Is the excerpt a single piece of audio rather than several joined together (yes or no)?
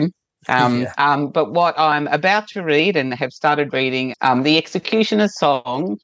no